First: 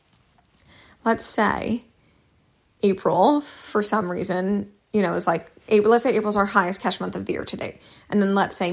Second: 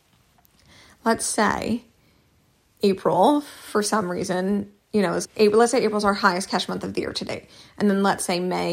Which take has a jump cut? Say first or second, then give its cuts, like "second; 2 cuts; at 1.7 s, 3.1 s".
second; 1 cut; at 5.2 s